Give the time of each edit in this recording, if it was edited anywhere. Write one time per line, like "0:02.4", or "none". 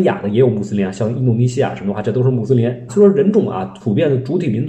0:02.9